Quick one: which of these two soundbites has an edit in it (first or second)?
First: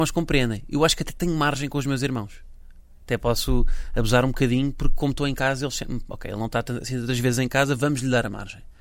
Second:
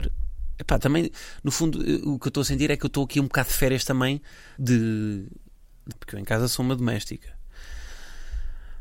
second